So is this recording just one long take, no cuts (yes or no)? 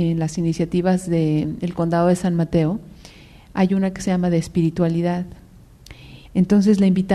no